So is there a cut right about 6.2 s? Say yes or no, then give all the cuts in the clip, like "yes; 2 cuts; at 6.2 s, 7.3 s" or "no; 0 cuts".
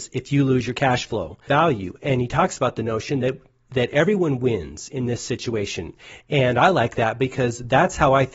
no; 1 cut; at 1.5 s